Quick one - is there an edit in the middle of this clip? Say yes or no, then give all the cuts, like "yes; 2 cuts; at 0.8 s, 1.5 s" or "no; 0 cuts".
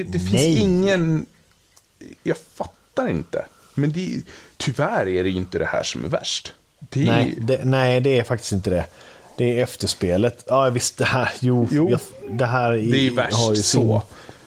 no; 0 cuts